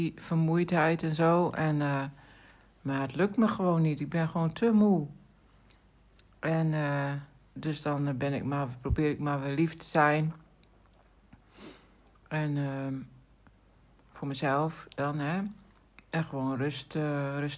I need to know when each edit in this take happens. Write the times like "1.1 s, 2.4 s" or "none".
none